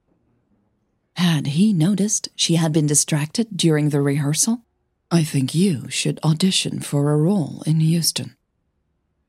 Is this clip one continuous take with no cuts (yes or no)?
no